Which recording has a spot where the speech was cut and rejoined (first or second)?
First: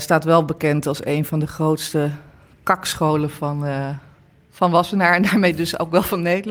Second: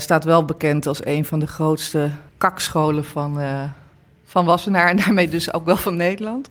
second